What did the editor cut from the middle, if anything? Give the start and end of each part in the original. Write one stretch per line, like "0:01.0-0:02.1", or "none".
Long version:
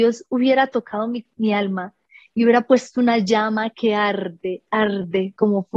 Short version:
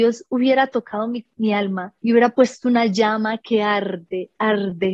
0:02.0-0:02.3